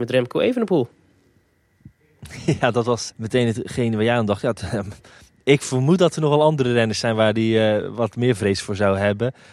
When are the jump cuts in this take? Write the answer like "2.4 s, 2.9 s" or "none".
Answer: 3.1 s